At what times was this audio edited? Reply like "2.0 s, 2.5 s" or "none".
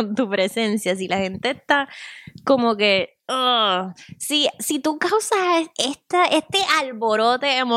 none